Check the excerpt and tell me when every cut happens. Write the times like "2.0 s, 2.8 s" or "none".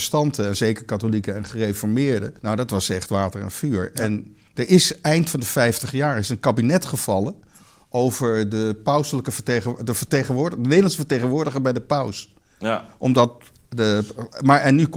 2.4 s